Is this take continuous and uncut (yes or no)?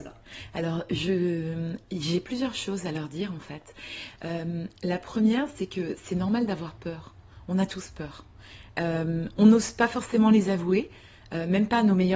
yes